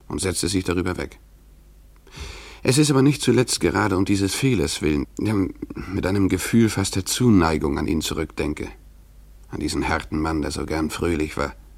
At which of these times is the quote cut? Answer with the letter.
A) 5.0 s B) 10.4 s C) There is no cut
A